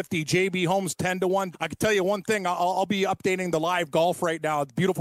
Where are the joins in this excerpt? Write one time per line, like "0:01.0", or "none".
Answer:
0:01.5